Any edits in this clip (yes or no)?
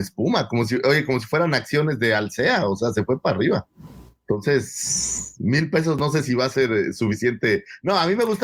no